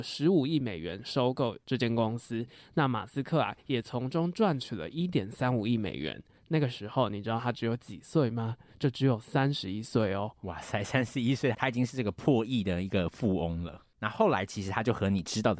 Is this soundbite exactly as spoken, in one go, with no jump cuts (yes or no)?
yes